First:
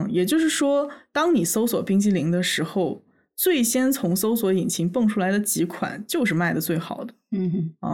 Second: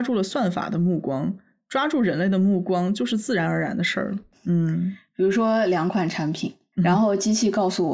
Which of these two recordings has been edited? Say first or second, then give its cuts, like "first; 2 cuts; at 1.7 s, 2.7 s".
second; 2 cuts; at 4.3 s, 6.7 s